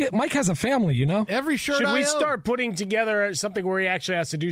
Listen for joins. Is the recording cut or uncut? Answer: uncut